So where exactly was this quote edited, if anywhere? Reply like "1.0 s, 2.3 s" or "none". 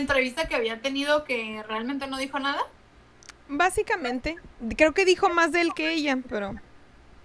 none